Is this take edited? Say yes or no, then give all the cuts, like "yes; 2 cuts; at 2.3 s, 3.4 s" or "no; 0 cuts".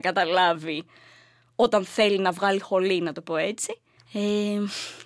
yes; 1 cut; at 4.0 s